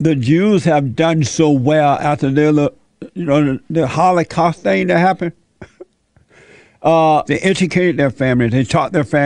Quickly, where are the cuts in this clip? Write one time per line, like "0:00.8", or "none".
0:07.3